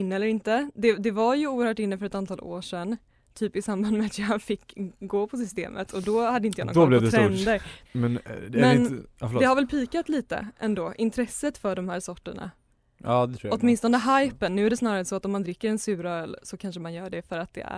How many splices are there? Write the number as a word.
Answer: one